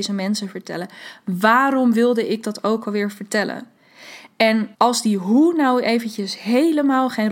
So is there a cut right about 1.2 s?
no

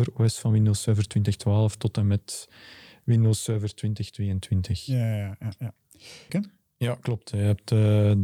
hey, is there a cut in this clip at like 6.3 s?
yes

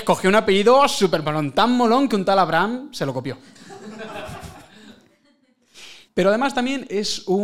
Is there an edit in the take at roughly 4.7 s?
no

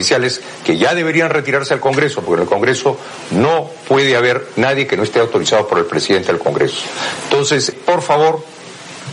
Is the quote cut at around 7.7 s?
yes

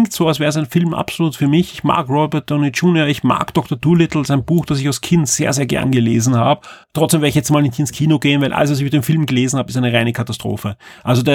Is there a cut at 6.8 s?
yes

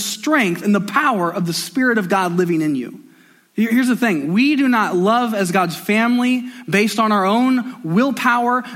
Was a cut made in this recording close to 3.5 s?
yes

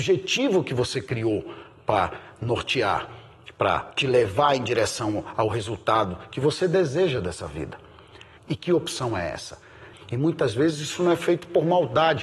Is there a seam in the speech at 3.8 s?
no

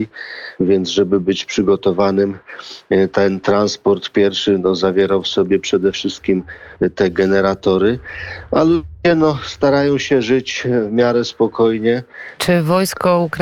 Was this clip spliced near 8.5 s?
no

